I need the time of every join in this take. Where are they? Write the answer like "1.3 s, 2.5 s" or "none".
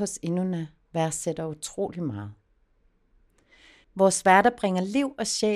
3.8 s